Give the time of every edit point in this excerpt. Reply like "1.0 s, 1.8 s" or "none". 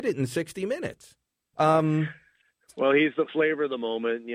1.5 s